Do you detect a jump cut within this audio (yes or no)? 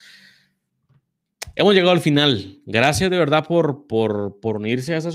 no